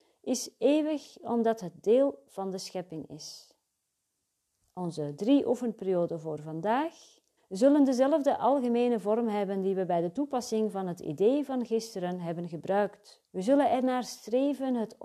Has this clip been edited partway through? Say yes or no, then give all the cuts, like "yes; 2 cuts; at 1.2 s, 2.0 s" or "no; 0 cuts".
yes; 2 cuts; at 7.4 s, 13.3 s